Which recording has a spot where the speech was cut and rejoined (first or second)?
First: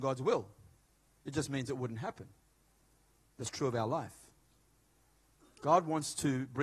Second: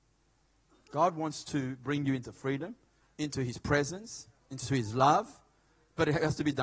second